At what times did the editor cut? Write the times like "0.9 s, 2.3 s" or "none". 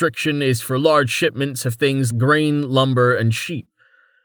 2.1 s